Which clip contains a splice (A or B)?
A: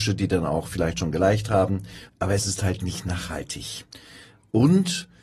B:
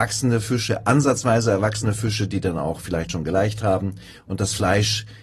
A